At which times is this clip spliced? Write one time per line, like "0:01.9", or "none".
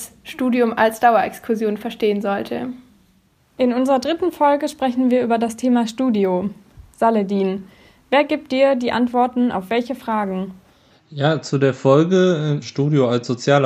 0:12.6